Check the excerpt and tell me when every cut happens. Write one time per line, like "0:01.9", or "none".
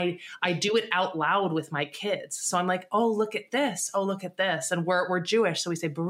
none